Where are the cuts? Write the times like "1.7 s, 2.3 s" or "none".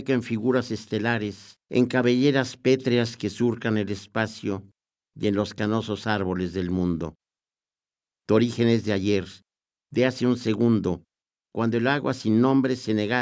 1.6 s